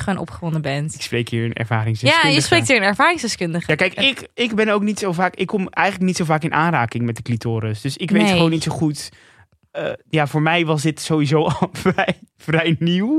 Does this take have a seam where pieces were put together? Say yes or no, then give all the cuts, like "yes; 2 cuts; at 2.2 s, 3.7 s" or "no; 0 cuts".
no; 0 cuts